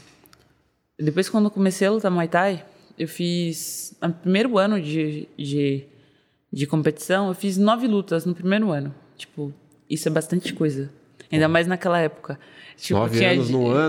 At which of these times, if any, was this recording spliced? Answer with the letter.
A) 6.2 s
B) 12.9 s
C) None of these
C